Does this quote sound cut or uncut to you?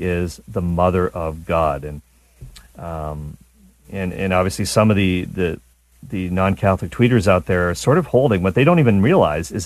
uncut